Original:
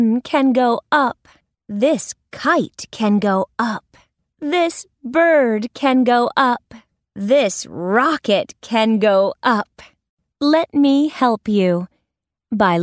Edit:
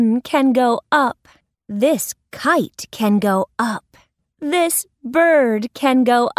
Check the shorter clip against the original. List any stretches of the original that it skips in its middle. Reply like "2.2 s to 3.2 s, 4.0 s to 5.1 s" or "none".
none